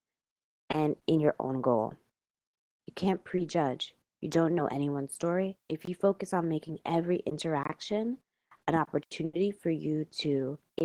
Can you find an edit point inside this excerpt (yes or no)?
yes